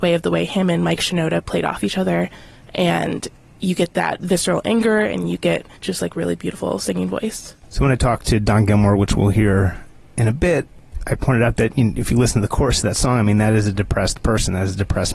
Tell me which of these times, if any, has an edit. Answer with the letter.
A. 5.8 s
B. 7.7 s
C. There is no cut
A